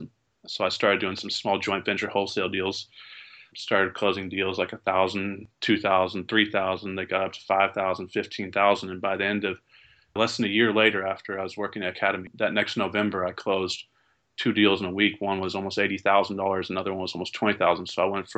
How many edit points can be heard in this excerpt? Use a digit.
0